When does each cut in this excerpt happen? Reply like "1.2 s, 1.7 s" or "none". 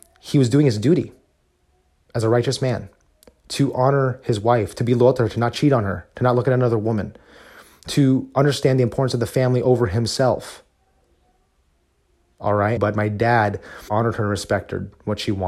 12.8 s, 13.9 s

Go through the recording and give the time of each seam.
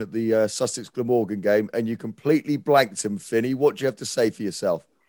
none

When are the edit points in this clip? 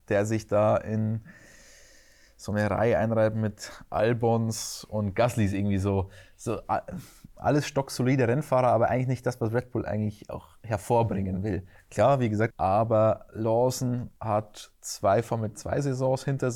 12.5 s, 14.2 s

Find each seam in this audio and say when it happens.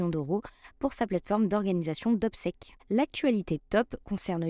2.8 s

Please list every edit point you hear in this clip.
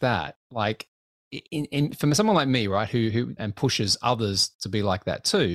3.4 s

